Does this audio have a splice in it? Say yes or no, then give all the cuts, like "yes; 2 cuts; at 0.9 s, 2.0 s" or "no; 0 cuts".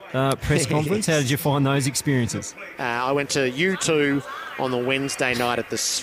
yes; 1 cut; at 2.8 s